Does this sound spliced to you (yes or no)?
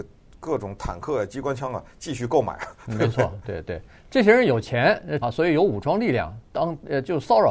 yes